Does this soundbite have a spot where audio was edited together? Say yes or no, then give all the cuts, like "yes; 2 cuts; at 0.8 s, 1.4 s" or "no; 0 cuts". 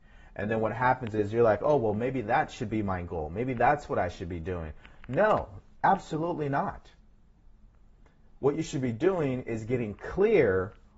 no; 0 cuts